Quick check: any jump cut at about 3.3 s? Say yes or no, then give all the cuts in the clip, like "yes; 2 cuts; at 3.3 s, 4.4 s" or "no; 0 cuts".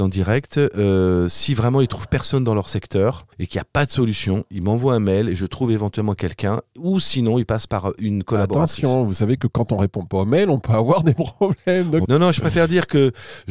yes; 2 cuts; at 3.3 s, 12.0 s